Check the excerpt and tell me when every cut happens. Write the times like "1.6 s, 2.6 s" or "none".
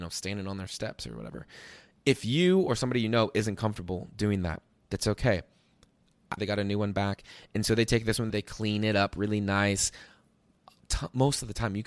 6.4 s, 8.3 s